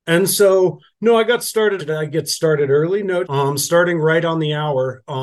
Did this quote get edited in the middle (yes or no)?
yes